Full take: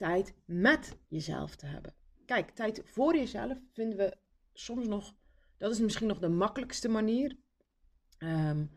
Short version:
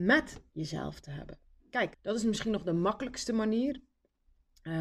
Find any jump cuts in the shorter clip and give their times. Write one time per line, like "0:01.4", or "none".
0:01.9